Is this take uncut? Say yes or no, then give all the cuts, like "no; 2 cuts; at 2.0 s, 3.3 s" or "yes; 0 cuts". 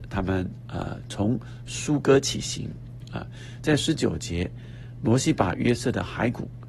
yes; 0 cuts